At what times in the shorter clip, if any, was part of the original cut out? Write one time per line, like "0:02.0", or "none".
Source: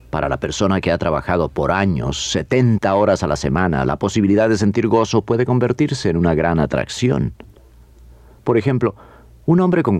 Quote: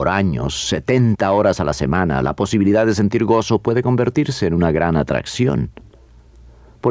none